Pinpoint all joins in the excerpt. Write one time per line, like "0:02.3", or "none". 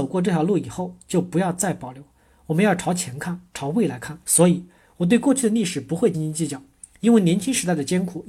0:04.2
0:06.1